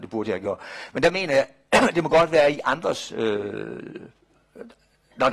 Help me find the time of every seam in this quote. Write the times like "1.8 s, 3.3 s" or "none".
none